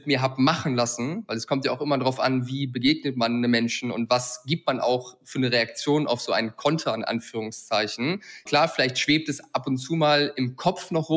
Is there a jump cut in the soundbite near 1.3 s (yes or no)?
no